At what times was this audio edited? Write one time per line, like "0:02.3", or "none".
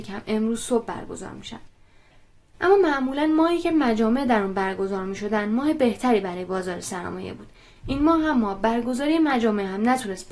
none